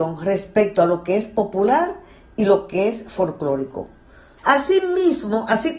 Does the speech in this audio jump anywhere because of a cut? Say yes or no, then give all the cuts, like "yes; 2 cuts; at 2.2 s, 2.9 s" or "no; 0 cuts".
yes; 1 cut; at 4.4 s